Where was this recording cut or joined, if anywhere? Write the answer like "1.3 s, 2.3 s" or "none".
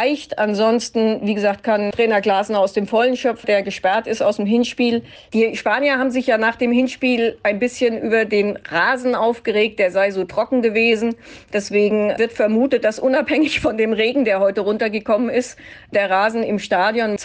3.4 s